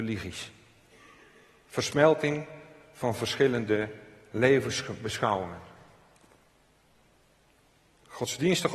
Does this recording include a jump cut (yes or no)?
no